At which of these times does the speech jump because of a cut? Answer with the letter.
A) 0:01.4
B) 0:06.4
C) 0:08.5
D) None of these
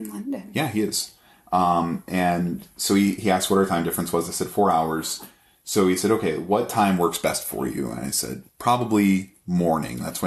C